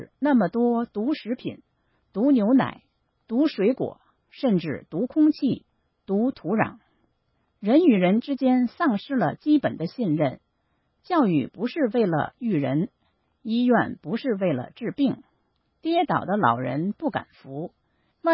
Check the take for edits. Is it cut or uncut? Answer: uncut